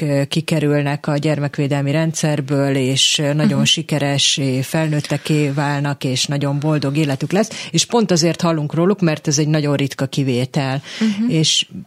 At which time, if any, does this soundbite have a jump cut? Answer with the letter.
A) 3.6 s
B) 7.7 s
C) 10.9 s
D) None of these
D